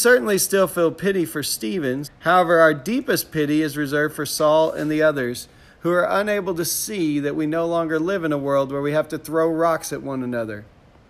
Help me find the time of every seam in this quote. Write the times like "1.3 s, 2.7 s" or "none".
2.0 s